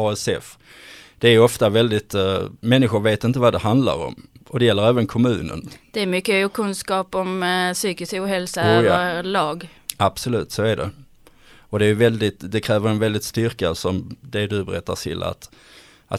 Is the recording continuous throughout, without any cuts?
yes; 0 cuts

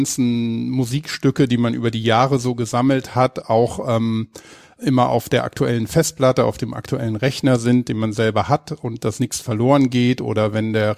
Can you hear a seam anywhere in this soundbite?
no; 0 cuts

